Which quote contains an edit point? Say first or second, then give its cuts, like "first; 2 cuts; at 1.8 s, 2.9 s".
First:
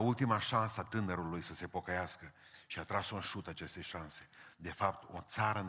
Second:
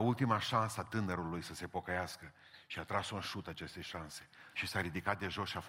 second; 1 cut; at 4.5 s